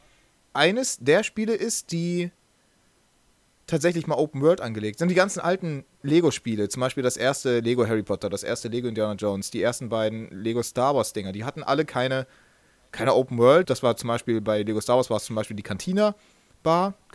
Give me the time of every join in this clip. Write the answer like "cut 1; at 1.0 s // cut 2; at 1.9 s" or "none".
cut 1; at 13.6 s